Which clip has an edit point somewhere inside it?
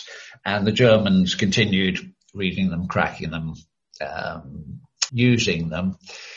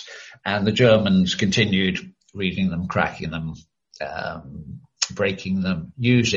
first; 1 cut; at 5.1 s

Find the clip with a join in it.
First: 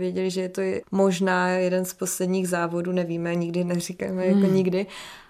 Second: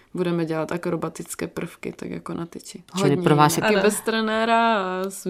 second; 1 cut; at 3.6 s

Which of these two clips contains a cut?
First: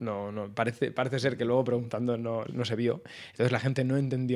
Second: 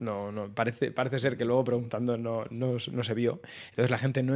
first; 1 cut; at 2.5 s

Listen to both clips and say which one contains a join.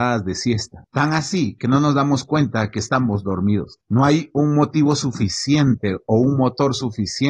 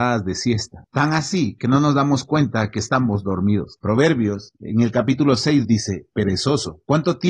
second; 2 cuts; at 3.8 s, 5.6 s

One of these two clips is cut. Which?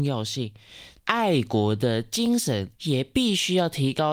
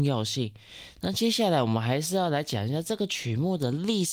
first; 2 cuts; at 1.0 s, 2.7 s

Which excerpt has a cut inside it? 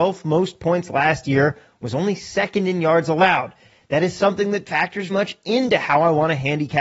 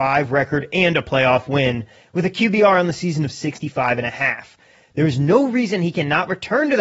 first; 1 cut; at 5.1 s

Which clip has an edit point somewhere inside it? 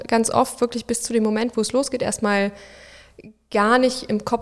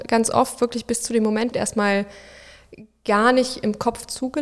second; 1 cut; at 1.5 s

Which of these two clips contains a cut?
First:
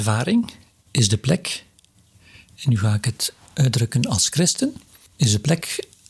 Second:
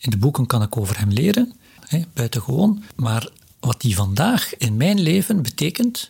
second; 1 cut; at 1.8 s

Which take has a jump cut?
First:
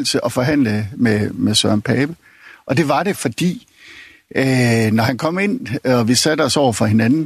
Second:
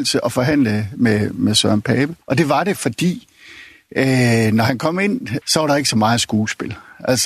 second; 2 cuts; at 2.2 s, 5.4 s

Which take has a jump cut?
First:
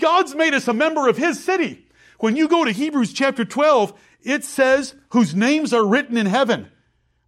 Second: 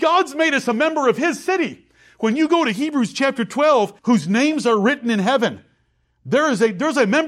second; 1 cut; at 4.0 s

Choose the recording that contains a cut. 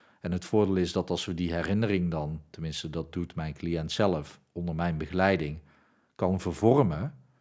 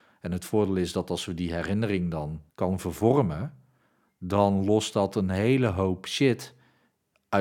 second; 1 cut; at 2.5 s

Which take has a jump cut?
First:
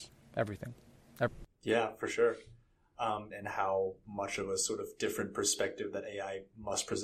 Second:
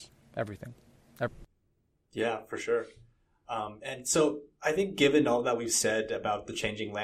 first; 2 cuts; at 1.5 s, 3.3 s

